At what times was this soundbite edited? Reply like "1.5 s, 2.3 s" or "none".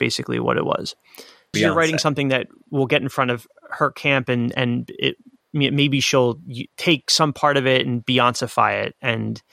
1.5 s, 6.7 s